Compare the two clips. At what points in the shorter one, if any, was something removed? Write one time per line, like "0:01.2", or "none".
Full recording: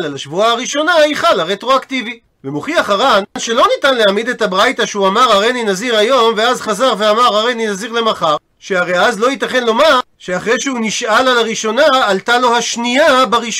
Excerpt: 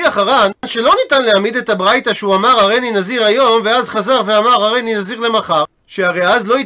none